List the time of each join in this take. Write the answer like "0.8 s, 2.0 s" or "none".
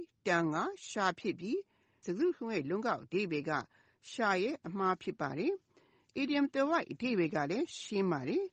none